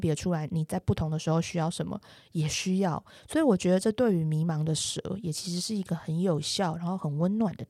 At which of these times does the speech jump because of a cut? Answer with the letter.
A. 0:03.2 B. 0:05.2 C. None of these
C